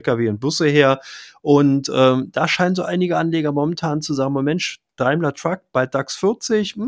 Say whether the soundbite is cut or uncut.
uncut